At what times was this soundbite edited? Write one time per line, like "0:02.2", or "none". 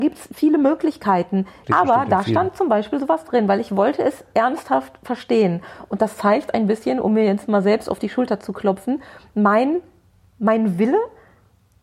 0:01.6

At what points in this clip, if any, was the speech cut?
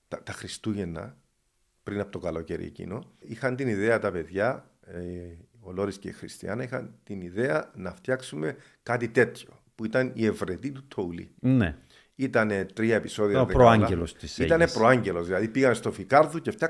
0:03.2

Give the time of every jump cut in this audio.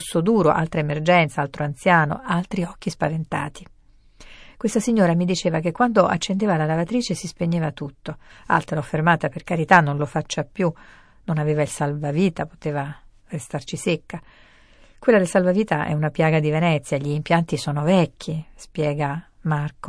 none

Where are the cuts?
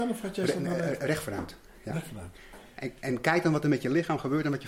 none

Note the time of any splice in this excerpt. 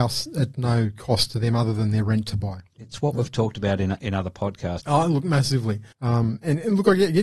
0:04.8
0:05.9

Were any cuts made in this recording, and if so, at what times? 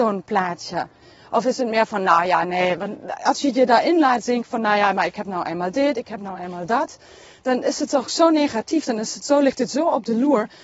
none

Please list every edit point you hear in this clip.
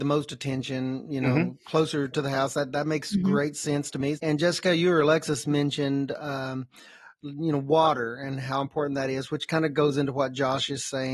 0:04.1

